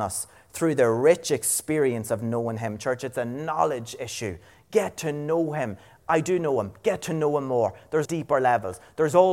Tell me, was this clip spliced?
yes; 1 cut; at 8.0 s

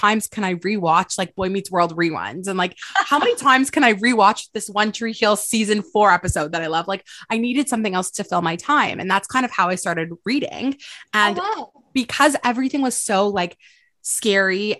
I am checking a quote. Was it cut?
no; 0 cuts

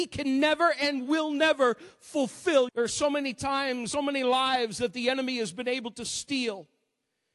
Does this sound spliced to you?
yes; 2 cuts; at 2.7 s, 3.9 s

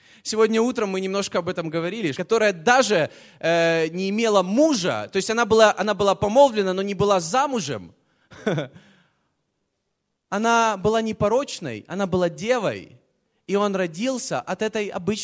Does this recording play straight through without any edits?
no; 1 cut; at 2.1 s

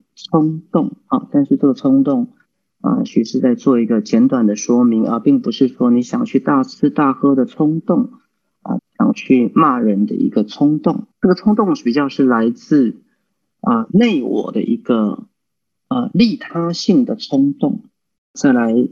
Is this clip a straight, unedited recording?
no; 2 cuts; at 8.8 s, 11.1 s

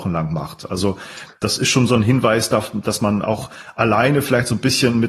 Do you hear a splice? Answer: no; 0 cuts

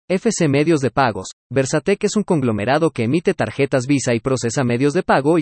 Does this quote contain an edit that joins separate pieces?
no; 0 cuts

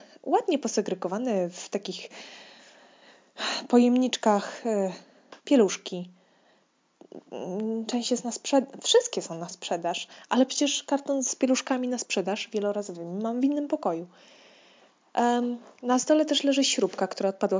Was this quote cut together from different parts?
yes; 1 cut; at 5.4 s

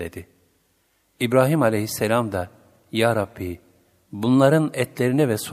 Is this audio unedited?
no; 1 cut; at 1.0 s

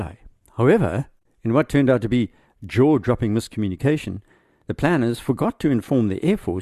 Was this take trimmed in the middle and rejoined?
no; 0 cuts

